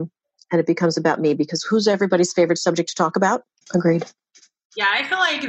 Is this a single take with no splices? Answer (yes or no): no